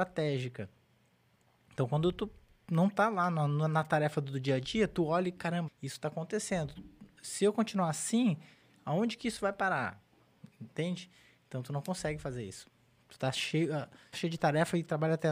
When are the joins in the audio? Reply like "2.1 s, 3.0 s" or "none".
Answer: 5.7 s, 14.1 s